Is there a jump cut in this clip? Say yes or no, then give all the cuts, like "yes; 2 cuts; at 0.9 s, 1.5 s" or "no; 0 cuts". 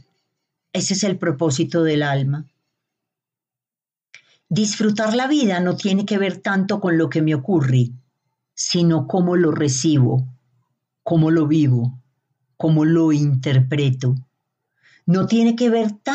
no; 0 cuts